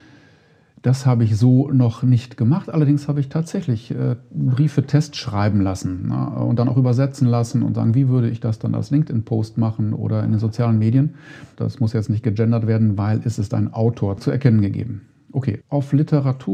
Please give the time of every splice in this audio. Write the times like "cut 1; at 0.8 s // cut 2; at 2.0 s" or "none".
cut 1; at 11.5 s // cut 2; at 14.2 s // cut 3; at 15.6 s